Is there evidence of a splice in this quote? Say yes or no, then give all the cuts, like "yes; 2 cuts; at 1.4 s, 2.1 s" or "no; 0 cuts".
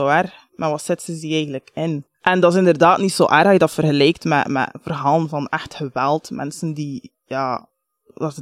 yes; 1 cut; at 2.1 s